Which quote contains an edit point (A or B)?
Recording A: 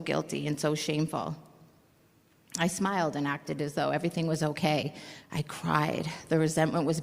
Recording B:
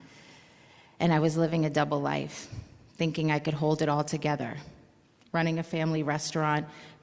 A